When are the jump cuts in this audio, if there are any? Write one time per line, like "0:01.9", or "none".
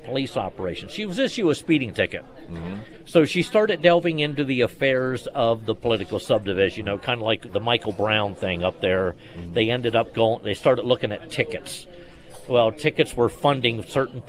0:07.5

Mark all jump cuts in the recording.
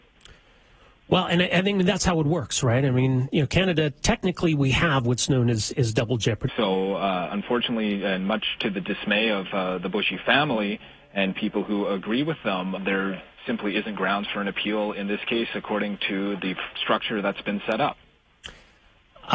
0:06.5
0:12.8

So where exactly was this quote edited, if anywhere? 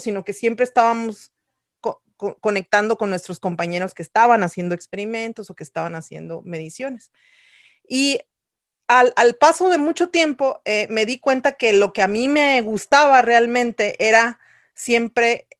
none

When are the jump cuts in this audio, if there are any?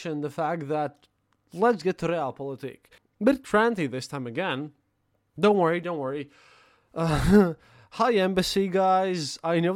0:03.0

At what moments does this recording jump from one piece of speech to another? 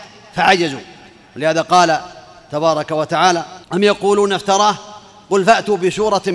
0:03.6

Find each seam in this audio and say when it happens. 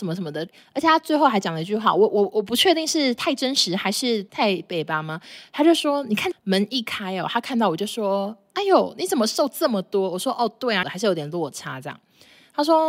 0:06.3
0:10.8

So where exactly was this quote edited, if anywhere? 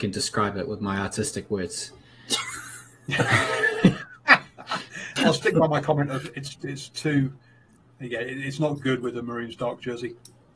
0:05.2

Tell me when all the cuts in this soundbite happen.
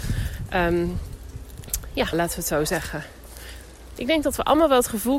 0:02.1
0:04.0

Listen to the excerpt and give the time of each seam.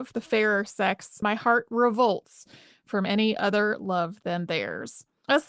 0:01.2

